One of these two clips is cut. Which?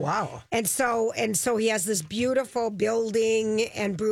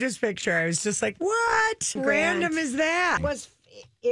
second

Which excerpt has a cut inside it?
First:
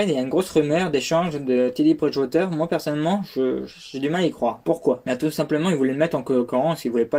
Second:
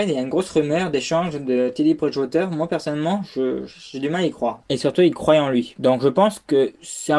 second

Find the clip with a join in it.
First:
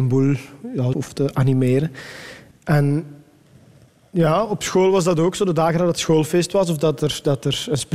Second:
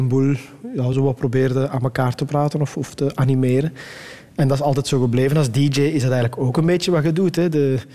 first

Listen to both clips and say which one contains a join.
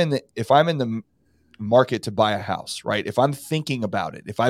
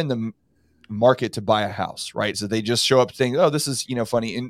second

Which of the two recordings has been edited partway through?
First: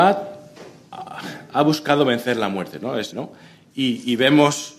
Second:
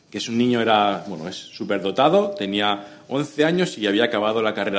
first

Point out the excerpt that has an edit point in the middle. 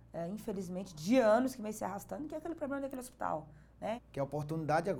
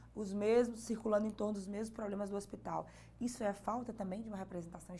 first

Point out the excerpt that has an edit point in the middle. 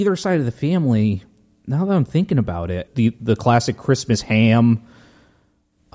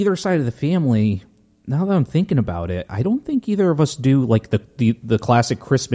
first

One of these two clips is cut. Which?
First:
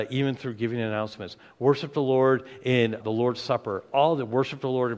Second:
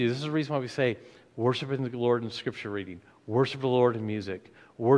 first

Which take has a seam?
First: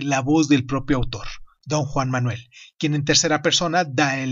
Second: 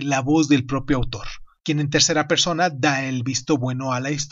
second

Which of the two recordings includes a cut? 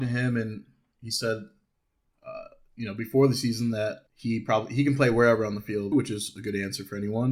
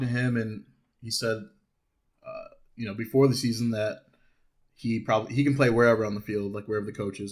first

